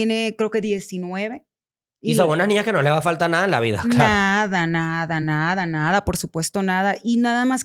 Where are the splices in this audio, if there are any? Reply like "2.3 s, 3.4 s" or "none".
none